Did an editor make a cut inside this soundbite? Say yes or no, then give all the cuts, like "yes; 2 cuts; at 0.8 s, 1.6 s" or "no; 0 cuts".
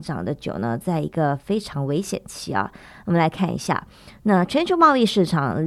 no; 0 cuts